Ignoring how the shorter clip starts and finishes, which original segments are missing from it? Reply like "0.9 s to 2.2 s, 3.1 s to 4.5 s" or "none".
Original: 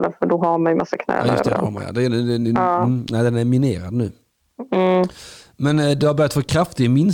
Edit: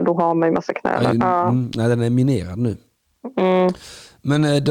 1.3 s to 2.5 s